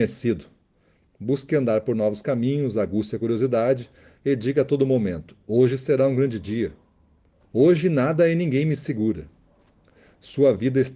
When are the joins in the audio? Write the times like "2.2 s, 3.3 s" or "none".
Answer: 1.0 s, 7.4 s